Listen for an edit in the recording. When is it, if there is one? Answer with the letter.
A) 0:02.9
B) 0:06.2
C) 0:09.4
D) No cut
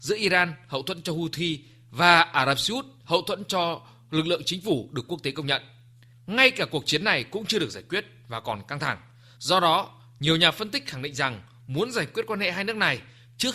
C